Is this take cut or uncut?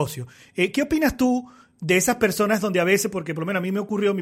uncut